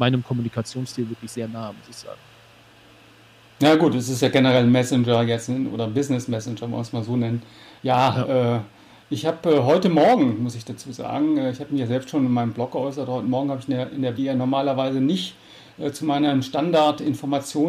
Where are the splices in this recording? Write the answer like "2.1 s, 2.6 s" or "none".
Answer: 7.8 s, 14.2 s